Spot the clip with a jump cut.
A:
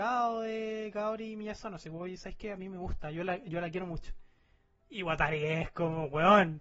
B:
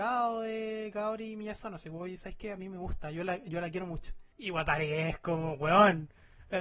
B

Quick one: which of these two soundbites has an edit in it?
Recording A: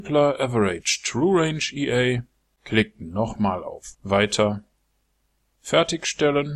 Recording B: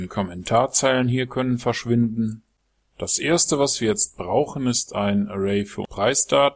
A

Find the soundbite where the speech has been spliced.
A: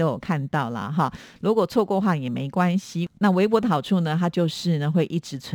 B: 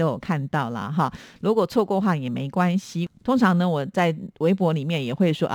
B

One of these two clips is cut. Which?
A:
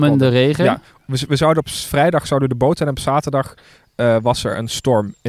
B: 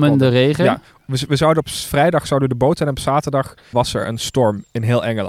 B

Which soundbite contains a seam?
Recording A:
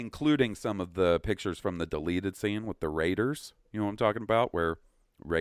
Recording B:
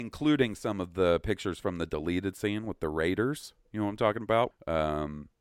B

